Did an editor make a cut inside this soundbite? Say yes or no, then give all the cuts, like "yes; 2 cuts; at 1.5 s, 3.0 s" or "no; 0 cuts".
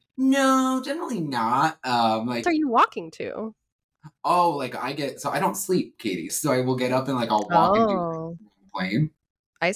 yes; 2 cuts; at 2.4 s, 6.3 s